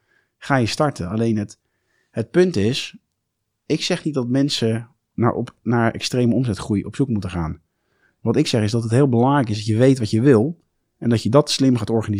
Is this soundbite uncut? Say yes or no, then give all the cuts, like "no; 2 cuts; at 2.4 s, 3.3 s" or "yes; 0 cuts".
yes; 0 cuts